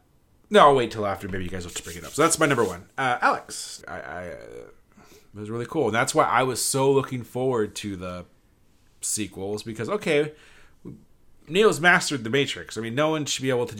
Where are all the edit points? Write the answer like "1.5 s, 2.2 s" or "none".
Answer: 3.8 s